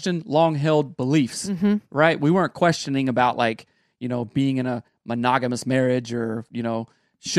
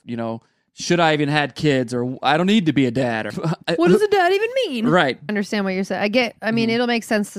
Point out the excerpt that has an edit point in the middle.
second; 2 cuts; at 3.3 s, 5.3 s

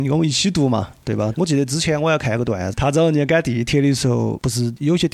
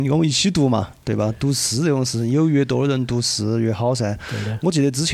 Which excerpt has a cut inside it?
first; 2 cuts; at 1.3 s, 2.7 s

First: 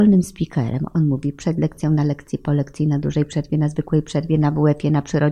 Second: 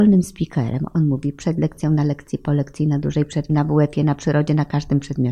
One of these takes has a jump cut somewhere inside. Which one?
second; 1 cut; at 3.5 s

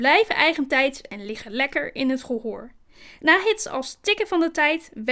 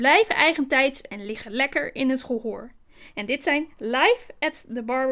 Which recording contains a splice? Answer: second; 1 cut; at 3.1 s

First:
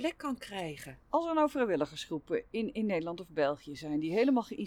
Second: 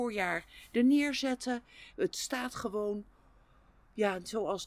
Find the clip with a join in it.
second; 1 cut; at 1.9 s

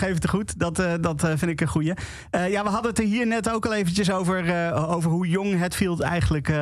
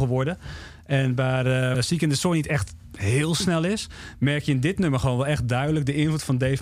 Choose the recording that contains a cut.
second; 1 cut; at 1.7 s

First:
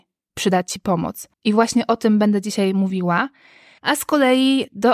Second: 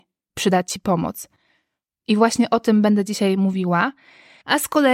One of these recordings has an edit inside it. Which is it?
first; 1 cut; at 1.3 s

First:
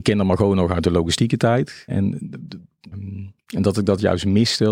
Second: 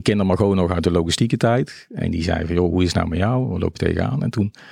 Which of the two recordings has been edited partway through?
first; 2 cuts; at 1.9 s, 2.9 s

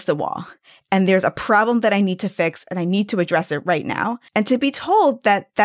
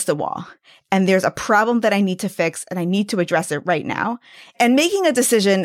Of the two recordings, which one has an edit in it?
first; 1 cut; at 4.3 s

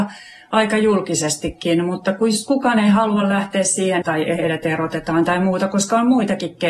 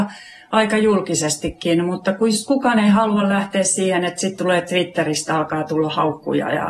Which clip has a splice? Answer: first; 1 cut; at 4.0 s

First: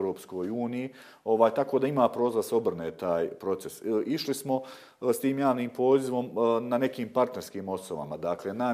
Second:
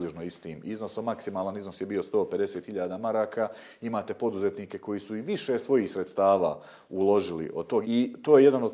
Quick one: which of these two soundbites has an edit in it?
second; 1 cut; at 7.8 s

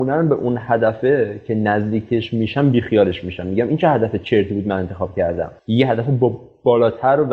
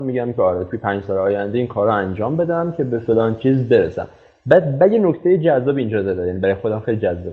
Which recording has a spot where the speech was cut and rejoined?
first; 1 cut; at 5.6 s

